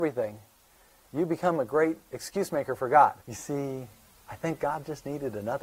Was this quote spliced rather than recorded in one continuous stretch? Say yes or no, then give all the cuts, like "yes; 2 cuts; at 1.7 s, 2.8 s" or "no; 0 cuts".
yes; 1 cut; at 3.2 s